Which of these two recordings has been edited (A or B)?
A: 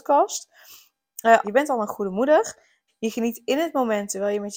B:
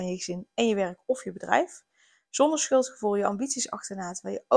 A